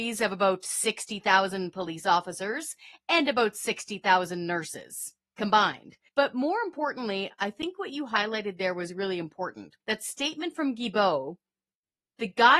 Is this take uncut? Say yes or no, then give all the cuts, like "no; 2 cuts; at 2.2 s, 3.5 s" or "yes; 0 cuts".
no; 2 cuts; at 6.1 s, 9.8 s